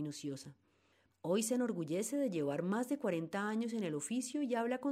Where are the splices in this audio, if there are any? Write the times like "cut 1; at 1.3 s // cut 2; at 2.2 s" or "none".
cut 1; at 1.1 s